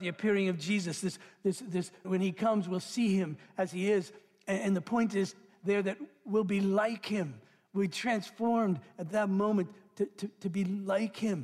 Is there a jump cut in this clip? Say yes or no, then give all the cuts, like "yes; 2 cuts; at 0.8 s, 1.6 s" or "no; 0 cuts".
yes; 1 cut; at 2.0 s